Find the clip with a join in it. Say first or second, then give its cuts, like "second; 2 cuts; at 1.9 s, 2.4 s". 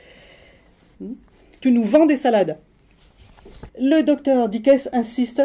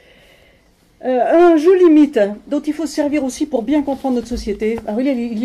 first; 2 cuts; at 0.9 s, 3.7 s